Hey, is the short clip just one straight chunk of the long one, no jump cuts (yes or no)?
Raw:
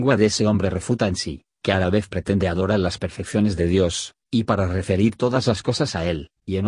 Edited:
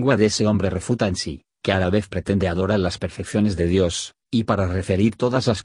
yes